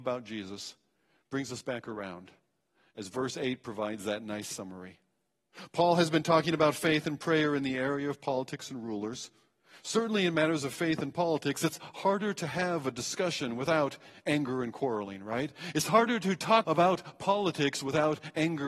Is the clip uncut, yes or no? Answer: no